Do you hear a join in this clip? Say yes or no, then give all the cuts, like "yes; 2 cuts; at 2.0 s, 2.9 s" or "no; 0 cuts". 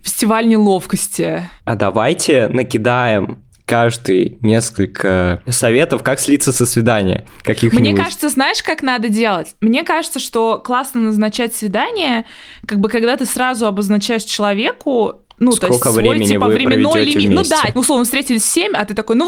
no; 0 cuts